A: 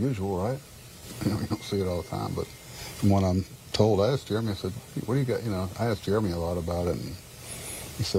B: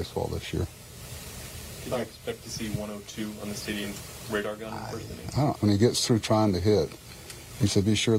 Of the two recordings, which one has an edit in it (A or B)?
B